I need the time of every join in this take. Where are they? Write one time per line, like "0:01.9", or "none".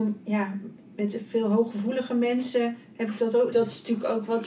0:03.5